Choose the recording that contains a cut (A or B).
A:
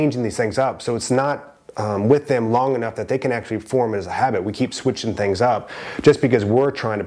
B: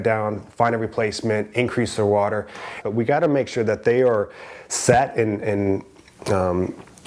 B